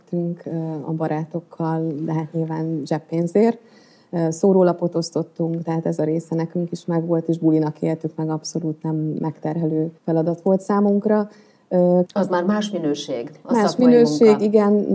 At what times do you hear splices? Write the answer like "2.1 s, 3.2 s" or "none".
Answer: 10.0 s, 12.0 s